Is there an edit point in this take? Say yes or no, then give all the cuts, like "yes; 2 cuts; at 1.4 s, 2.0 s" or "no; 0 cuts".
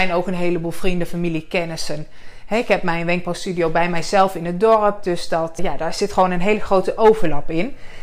yes; 1 cut; at 5.6 s